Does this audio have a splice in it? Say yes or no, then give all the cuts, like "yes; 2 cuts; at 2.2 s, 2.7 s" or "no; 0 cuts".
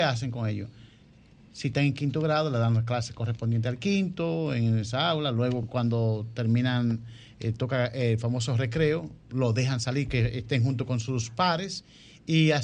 no; 0 cuts